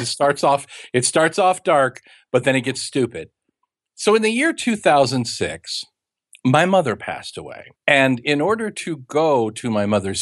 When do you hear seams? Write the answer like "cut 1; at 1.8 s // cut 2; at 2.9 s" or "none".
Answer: cut 1; at 7.7 s